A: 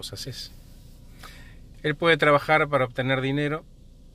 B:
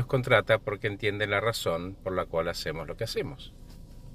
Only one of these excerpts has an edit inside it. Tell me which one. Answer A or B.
A